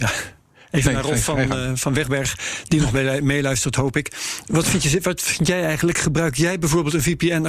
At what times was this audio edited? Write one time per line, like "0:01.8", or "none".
none